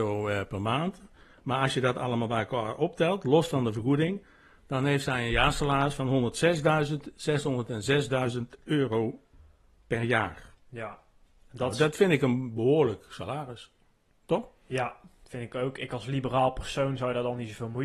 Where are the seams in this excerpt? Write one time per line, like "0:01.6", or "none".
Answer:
none